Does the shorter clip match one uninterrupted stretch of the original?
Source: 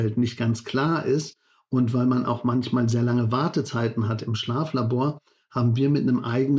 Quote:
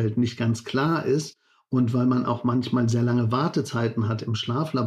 yes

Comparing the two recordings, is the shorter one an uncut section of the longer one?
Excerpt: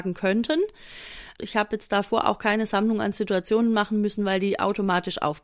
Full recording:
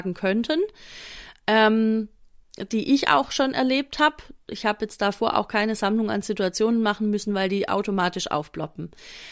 no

